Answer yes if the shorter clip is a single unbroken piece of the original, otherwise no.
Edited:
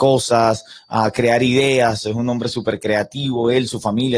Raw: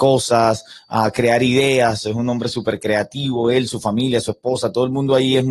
yes